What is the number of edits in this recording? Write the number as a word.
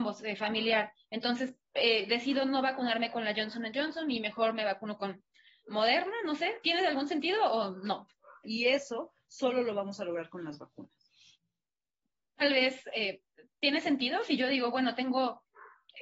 one